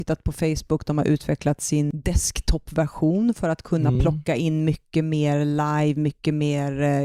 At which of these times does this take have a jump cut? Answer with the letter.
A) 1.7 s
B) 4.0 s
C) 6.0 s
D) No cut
D